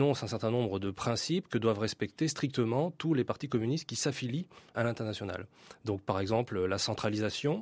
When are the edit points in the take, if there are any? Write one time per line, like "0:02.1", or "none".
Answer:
0:04.7